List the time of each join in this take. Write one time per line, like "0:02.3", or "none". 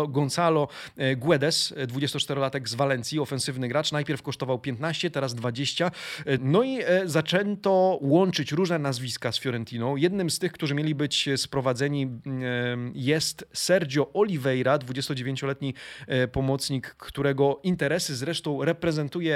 0:06.4